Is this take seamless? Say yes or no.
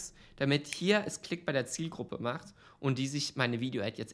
yes